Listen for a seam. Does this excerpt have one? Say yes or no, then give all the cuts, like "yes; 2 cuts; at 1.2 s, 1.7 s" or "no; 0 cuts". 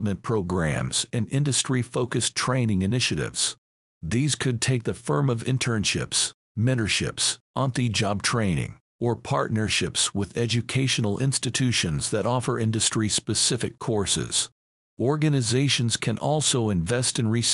no; 0 cuts